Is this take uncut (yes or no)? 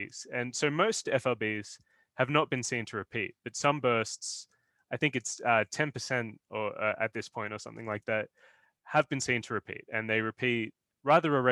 yes